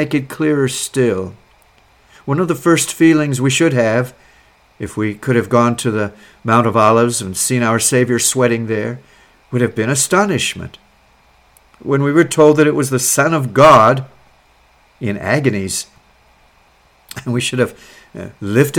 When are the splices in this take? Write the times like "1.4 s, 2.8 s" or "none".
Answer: 2.2 s